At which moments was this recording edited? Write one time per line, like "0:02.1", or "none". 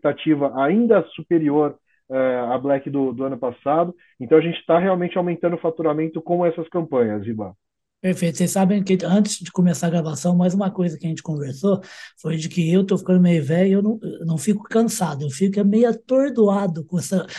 none